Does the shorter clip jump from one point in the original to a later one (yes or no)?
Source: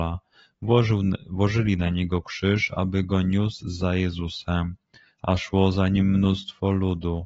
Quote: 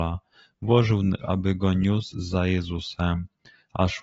yes